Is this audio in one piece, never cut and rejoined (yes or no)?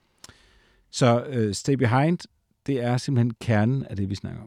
yes